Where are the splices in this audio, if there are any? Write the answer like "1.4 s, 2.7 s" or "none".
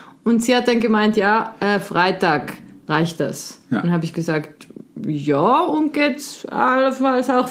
none